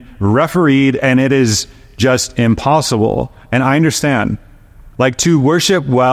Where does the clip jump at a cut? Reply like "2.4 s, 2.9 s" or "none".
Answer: none